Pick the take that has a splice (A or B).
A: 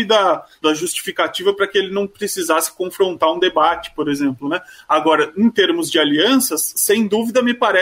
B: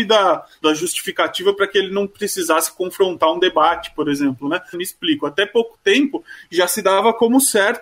B